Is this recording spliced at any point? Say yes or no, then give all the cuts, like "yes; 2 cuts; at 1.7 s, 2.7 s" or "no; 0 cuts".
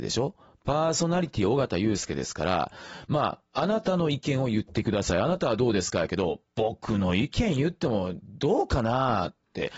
no; 0 cuts